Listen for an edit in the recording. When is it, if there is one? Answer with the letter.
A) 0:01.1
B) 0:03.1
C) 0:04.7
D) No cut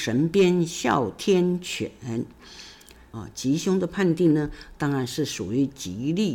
B